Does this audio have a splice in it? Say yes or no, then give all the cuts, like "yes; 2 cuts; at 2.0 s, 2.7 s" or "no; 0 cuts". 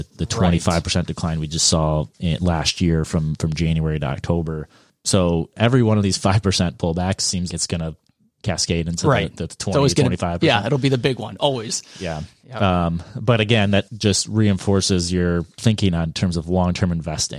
yes; 1 cut; at 7.5 s